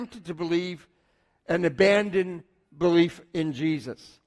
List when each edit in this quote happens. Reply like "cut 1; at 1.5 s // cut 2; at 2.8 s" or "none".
none